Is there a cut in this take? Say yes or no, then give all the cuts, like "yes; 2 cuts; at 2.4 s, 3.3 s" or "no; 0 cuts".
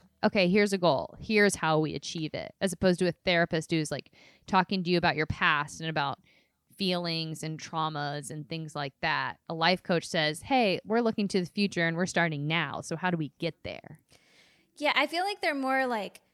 no; 0 cuts